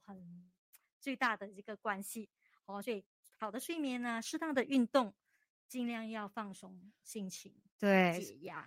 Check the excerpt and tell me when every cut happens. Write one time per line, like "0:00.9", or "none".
none